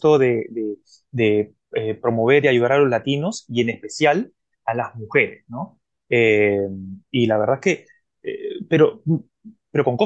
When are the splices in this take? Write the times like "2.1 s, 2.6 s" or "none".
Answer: none